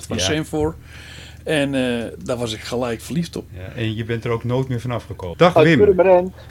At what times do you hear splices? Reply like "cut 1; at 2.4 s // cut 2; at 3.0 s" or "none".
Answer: cut 1; at 3.5 s // cut 2; at 5.3 s